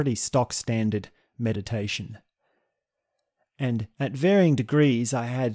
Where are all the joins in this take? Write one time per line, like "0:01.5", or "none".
none

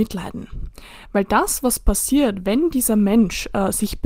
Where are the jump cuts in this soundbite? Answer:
none

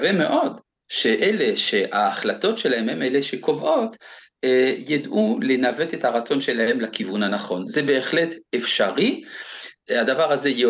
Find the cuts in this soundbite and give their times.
none

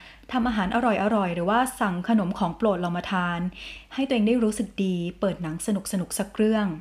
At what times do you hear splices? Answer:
none

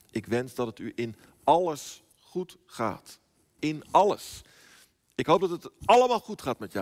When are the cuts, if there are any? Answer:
0:03.6

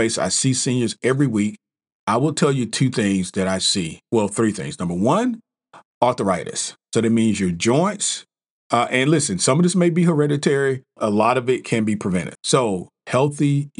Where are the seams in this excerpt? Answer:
0:11.0
0:12.4

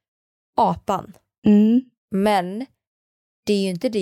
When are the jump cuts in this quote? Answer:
none

